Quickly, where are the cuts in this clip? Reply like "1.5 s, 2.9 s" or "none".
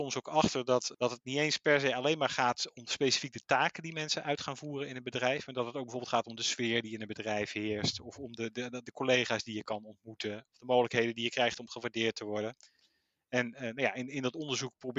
none